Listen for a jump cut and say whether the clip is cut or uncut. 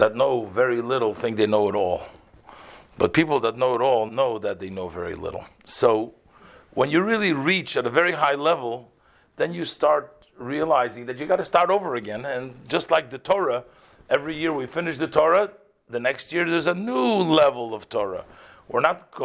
cut